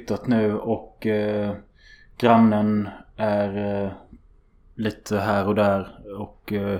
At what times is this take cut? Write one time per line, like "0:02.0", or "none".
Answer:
none